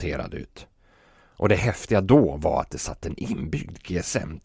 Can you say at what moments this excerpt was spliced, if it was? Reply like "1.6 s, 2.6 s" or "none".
none